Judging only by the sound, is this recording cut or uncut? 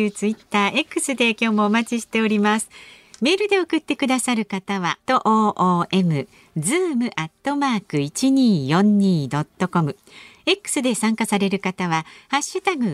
cut